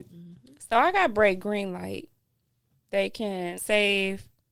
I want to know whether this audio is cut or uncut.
cut